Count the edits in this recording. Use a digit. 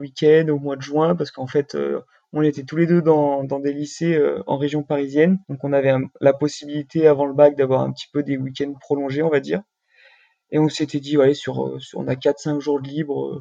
1